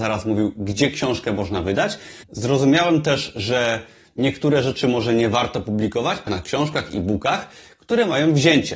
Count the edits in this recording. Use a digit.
2